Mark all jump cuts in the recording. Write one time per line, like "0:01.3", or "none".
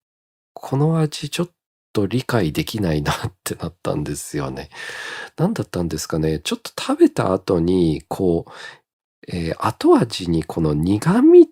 none